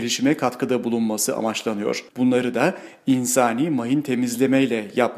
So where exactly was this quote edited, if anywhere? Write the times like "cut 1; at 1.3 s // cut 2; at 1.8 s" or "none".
cut 1; at 2.1 s